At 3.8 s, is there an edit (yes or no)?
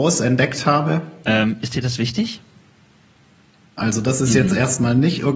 yes